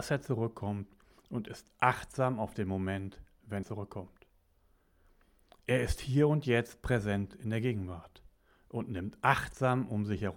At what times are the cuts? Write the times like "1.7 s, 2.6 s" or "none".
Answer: 3.6 s